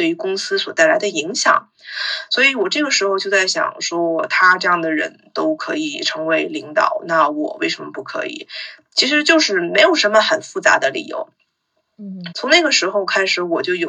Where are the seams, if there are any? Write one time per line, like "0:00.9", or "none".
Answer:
0:12.3